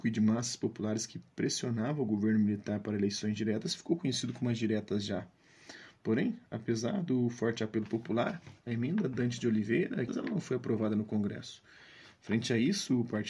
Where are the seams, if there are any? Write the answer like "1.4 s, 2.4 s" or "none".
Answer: 10.1 s

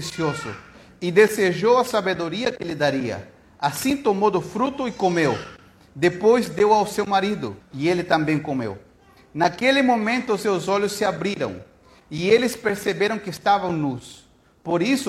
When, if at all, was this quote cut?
7.6 s

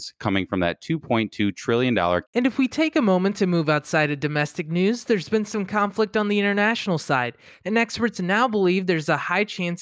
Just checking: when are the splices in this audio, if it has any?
2.2 s, 7.6 s

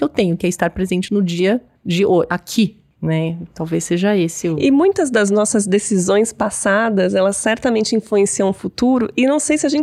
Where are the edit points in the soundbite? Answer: none

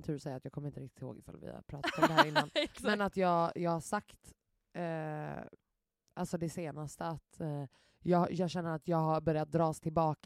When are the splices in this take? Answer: none

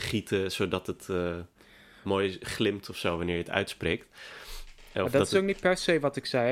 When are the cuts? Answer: none

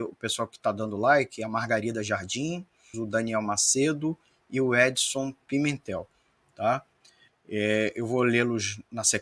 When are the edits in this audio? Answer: 2.9 s, 7.3 s

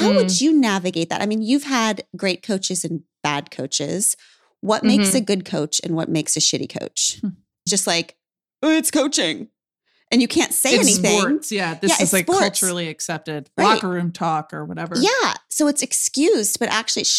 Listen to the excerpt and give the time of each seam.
7.7 s

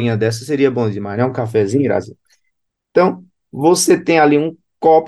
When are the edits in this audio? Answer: none

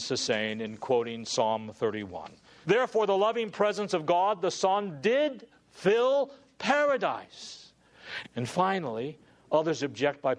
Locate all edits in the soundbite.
2.6 s, 8.2 s

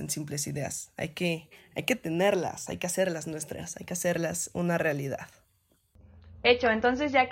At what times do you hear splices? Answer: 2.7 s

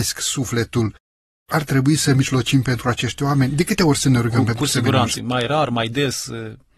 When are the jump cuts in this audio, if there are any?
5.1 s

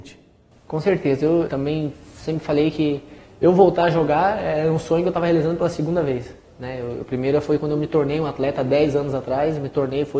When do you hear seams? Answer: 1.5 s

